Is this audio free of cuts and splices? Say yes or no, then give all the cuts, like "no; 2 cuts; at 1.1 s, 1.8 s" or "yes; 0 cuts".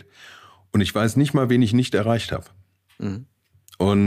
yes; 0 cuts